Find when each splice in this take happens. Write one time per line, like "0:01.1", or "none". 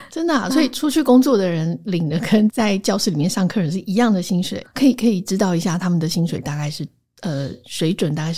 0:02.5
0:04.6